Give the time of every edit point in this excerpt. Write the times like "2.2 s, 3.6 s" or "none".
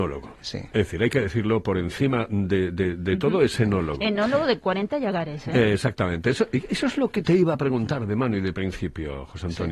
none